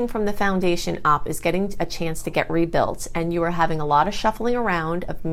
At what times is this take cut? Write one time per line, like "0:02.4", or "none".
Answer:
none